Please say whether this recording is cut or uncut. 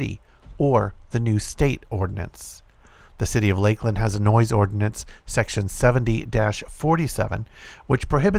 uncut